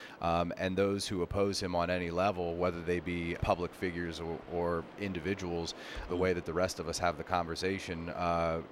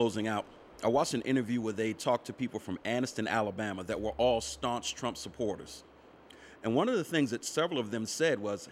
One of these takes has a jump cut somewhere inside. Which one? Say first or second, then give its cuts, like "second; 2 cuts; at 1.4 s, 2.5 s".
first; 2 cuts; at 3.4 s, 6.1 s